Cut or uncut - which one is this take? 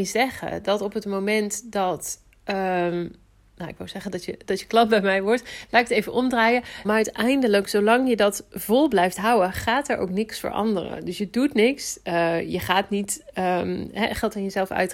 cut